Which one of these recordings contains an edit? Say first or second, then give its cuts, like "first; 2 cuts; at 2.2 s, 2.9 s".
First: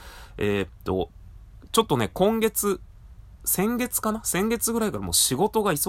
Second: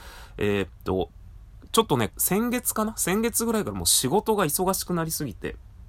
second; 1 cut; at 2.1 s